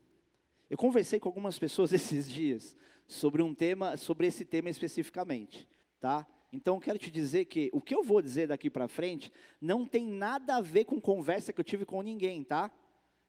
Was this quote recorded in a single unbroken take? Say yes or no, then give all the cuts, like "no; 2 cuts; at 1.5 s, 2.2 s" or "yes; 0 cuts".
no; 1 cut; at 5.8 s